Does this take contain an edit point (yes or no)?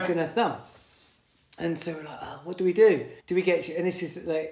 yes